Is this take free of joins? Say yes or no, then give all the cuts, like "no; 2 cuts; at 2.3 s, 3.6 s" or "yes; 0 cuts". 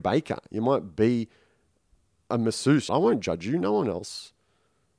no; 1 cut; at 2.9 s